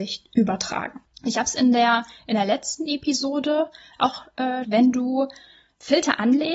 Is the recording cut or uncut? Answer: cut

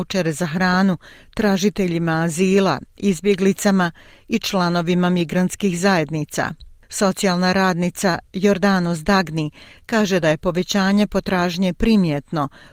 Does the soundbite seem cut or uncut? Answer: uncut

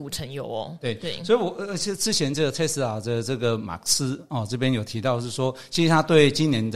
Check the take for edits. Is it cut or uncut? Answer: uncut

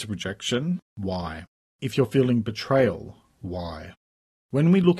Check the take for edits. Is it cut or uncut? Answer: uncut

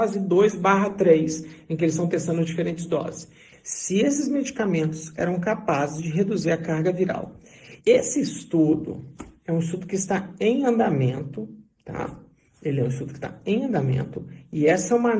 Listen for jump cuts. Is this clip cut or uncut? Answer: cut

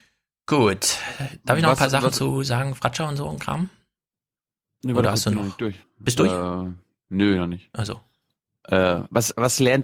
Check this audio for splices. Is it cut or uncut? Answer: cut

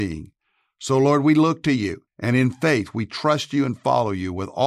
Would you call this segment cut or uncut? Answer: cut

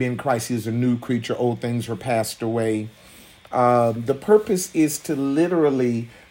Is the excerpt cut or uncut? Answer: uncut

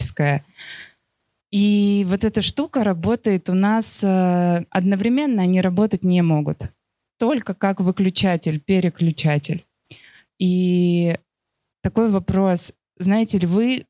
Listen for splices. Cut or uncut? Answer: uncut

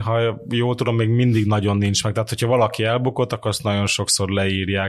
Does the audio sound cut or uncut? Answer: uncut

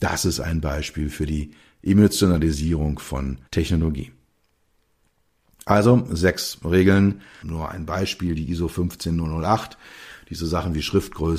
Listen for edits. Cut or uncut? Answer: cut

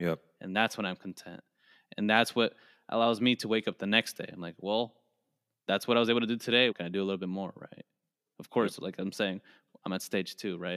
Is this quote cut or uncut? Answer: cut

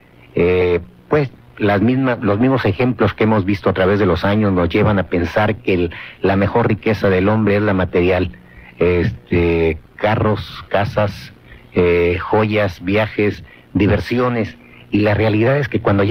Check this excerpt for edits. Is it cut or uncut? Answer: uncut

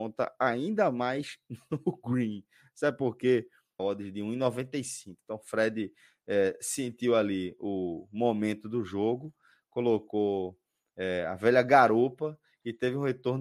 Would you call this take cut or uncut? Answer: cut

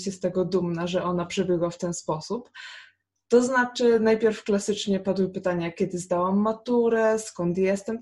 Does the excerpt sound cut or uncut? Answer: uncut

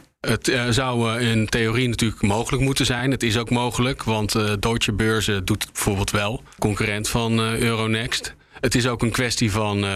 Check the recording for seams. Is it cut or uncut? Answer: uncut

